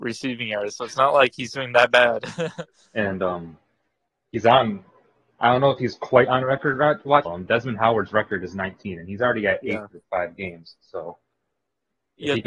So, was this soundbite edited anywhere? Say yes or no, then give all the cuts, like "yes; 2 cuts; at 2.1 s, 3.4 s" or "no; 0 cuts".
yes; 1 cut; at 7.2 s